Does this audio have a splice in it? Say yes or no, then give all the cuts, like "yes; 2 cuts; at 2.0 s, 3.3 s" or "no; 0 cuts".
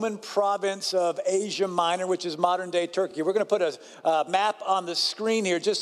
no; 0 cuts